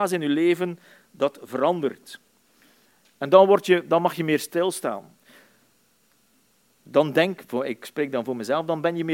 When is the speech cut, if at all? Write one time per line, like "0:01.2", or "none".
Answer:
none